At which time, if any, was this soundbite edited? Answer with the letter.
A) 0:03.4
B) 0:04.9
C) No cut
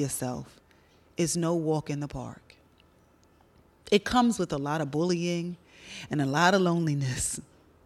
C